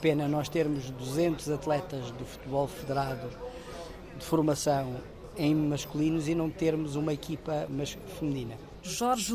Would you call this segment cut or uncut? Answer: uncut